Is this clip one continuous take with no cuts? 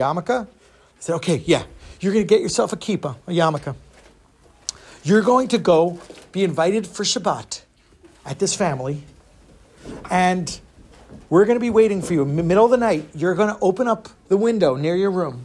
no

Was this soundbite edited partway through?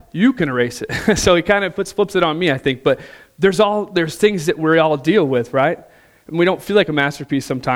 no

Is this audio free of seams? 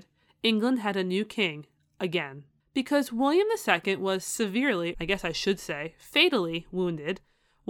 no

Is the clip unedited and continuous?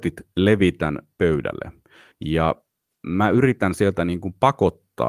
yes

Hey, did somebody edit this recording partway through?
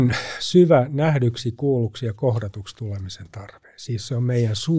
no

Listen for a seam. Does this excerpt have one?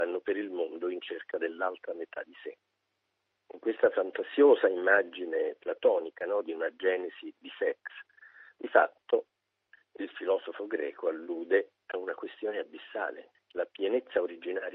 yes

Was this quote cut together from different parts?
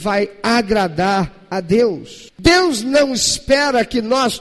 yes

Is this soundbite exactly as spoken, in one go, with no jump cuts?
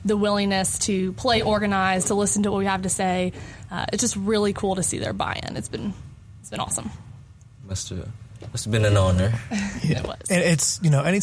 yes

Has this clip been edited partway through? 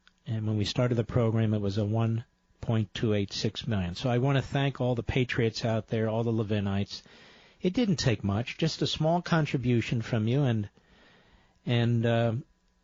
no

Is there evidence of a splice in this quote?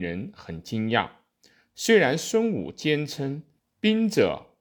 yes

